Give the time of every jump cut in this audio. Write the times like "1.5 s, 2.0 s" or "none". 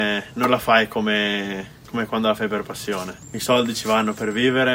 none